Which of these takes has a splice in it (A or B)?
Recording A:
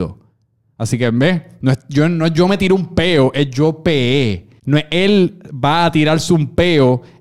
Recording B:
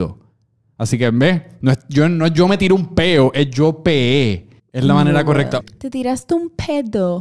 B